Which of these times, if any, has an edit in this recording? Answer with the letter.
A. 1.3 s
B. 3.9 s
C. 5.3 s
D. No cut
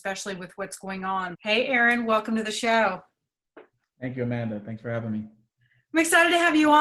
A